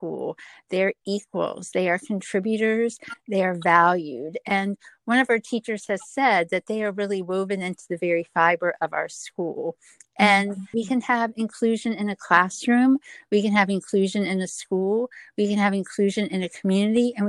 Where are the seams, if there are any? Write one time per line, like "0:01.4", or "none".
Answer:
0:10.7